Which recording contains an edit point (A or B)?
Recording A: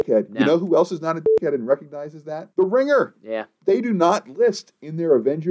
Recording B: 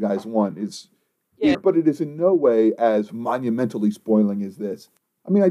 B